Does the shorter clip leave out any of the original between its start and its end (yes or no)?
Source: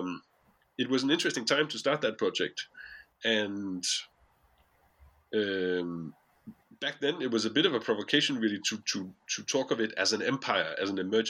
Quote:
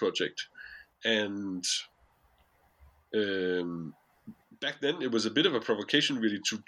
no